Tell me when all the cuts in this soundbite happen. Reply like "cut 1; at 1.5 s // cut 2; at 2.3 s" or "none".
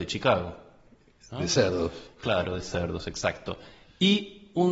none